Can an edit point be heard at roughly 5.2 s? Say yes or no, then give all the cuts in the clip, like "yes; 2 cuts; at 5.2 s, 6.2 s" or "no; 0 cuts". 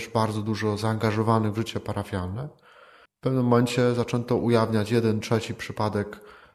yes; 2 cuts; at 3.1 s, 5.2 s